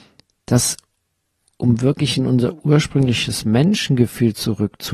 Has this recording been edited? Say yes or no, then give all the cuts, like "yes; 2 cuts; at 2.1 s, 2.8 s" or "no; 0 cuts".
no; 0 cuts